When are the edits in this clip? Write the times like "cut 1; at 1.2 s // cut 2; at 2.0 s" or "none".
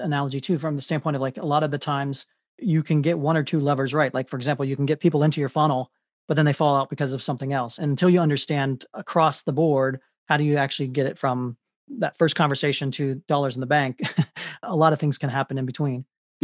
none